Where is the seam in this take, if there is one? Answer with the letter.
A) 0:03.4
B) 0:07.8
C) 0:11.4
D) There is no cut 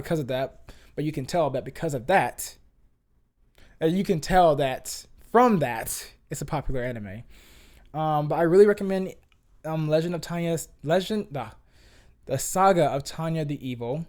D